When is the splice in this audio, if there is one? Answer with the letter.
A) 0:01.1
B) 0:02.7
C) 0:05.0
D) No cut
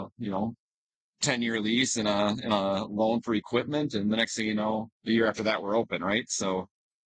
C